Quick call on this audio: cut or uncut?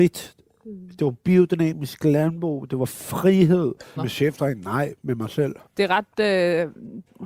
cut